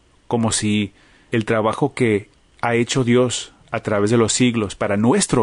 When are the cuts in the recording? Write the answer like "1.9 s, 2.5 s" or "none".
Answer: 1.3 s, 3.6 s